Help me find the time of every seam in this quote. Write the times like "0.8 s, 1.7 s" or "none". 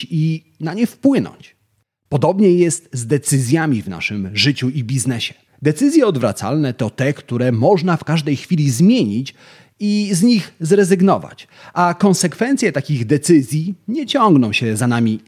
5.5 s